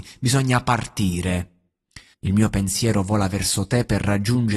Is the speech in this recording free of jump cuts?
no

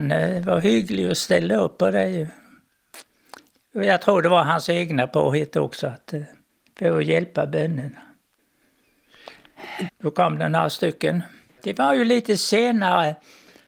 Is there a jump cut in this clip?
yes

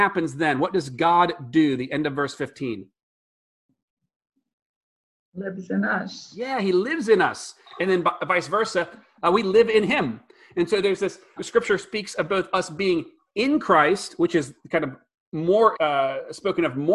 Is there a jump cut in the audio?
yes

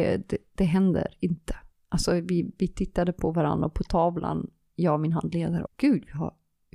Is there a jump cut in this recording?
yes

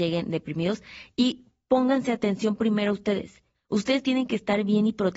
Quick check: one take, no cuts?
no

